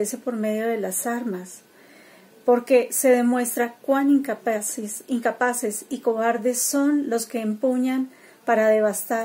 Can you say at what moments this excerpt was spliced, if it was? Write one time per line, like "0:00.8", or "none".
none